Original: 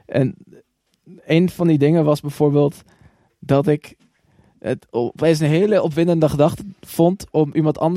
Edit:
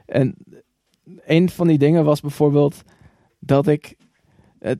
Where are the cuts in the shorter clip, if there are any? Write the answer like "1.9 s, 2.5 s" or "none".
none